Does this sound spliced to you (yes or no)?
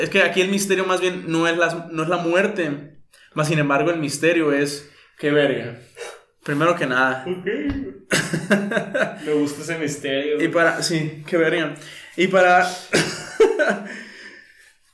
no